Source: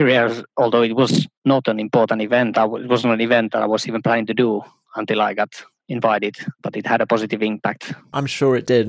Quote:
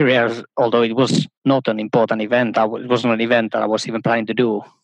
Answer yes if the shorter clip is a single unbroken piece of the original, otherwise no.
yes